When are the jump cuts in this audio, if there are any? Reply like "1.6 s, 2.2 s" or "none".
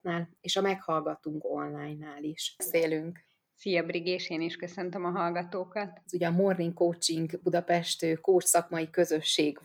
2.6 s, 6.0 s